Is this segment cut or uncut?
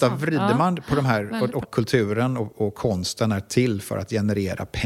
cut